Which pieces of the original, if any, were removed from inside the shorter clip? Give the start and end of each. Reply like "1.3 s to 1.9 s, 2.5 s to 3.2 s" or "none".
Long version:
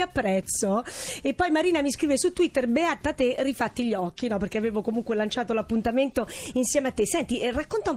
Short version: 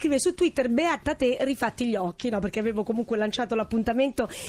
none